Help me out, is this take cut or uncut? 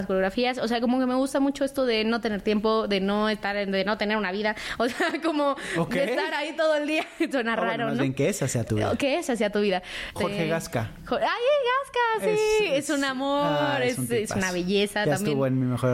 cut